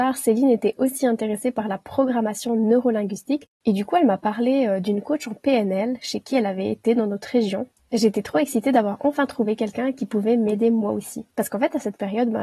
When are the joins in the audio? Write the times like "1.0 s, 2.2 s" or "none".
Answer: 11.3 s